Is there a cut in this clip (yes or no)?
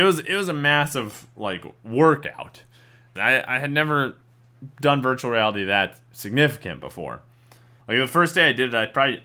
yes